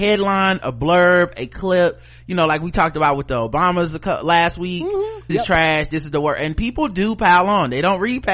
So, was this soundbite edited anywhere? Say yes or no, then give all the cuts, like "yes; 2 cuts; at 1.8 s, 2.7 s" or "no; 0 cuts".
yes; 1 cut; at 5.3 s